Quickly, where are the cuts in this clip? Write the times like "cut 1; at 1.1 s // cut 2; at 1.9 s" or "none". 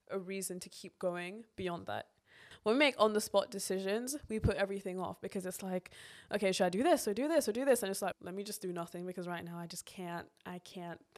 cut 1; at 8.1 s